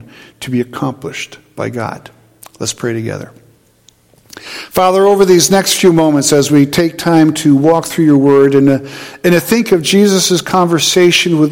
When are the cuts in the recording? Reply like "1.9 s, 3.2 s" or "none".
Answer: none